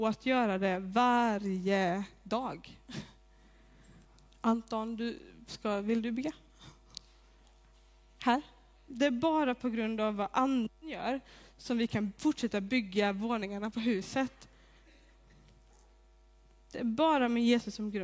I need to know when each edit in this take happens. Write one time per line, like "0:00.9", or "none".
0:08.9